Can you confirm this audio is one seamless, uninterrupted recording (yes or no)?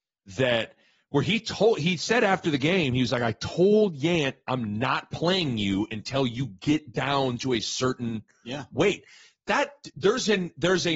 yes